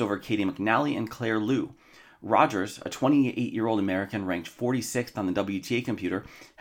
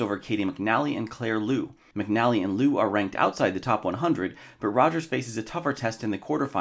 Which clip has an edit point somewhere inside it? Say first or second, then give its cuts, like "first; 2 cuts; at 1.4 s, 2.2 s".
second; 1 cut; at 1.9 s